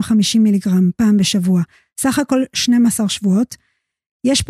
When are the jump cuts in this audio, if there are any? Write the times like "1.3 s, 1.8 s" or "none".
none